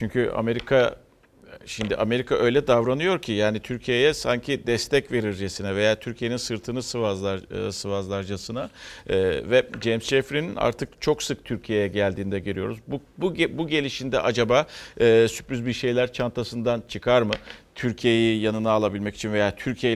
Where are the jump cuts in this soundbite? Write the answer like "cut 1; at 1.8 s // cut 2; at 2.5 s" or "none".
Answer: none